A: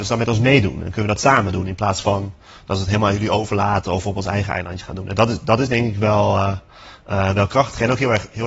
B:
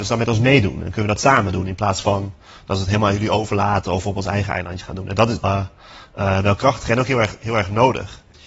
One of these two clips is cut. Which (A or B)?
B